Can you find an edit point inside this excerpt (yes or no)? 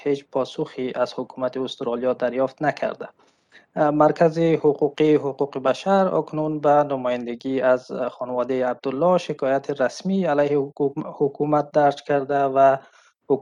no